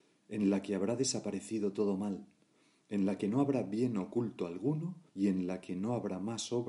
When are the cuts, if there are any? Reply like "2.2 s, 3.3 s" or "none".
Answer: 5.1 s